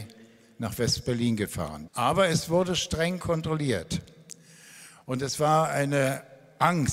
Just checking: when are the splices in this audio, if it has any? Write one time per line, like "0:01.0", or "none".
0:01.9